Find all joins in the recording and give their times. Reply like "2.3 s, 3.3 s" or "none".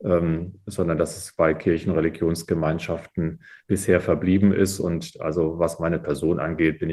none